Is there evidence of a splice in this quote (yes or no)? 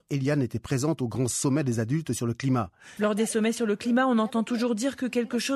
yes